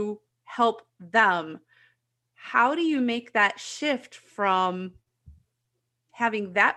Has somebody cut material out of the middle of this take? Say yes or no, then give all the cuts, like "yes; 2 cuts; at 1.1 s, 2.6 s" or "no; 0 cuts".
no; 0 cuts